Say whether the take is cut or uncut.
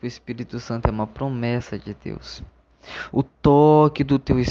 cut